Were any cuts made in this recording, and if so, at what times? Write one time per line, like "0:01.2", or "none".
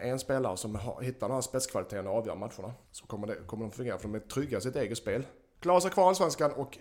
0:02.9
0:05.5